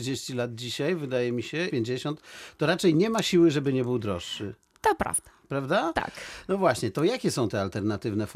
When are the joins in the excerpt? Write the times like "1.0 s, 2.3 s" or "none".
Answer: 1.7 s